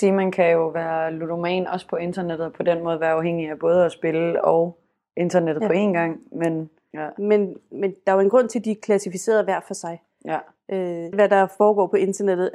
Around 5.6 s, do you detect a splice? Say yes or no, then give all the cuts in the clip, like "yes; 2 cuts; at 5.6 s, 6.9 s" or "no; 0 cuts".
no; 2 cuts; at 6.9 s, 11.1 s